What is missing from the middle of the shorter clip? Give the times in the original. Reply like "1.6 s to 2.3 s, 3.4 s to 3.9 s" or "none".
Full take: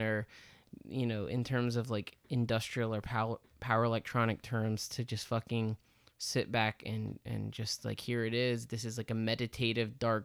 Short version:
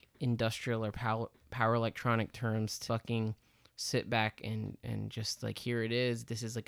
5.0 s to 5.3 s